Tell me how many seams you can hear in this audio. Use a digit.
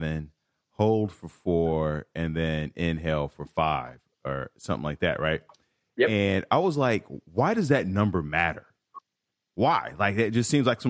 0